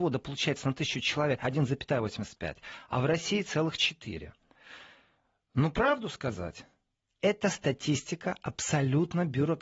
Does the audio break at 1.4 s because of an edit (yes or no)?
yes